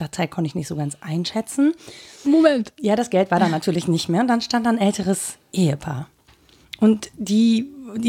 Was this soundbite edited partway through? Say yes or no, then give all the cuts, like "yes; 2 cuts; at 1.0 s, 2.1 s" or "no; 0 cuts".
yes; 1 cut; at 2.2 s